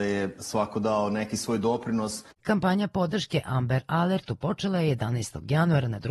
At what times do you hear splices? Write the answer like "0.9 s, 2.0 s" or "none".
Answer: 2.3 s